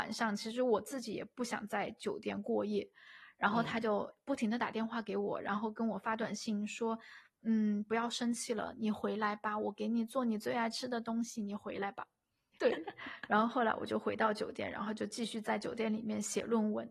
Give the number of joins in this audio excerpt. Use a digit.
1